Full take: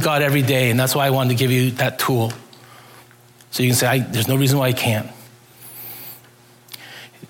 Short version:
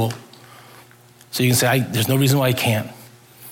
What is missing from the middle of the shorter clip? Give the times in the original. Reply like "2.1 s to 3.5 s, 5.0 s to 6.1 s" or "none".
none